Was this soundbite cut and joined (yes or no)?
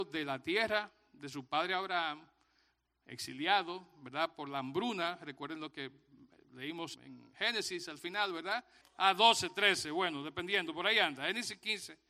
yes